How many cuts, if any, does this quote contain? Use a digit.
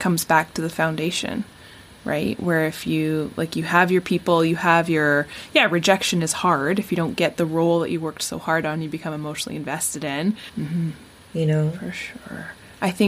1